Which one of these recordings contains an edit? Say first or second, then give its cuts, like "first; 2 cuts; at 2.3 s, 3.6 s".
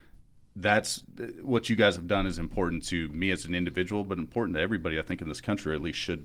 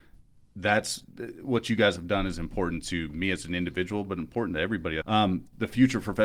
second; 1 cut; at 5.0 s